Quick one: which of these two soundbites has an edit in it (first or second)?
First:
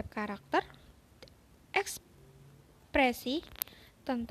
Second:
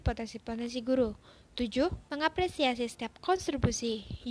second